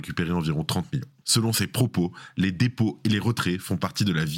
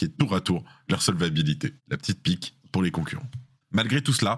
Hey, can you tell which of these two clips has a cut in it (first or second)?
first